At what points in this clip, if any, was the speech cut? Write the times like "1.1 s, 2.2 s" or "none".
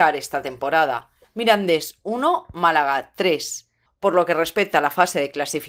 1.2 s, 3.9 s